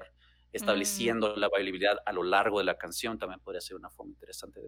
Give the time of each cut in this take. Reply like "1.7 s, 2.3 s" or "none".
none